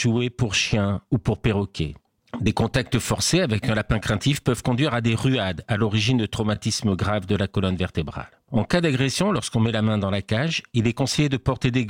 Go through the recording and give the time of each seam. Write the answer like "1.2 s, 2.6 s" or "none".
2.2 s